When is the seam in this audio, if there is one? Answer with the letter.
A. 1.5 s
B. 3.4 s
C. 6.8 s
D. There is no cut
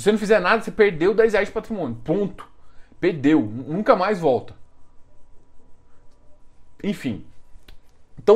D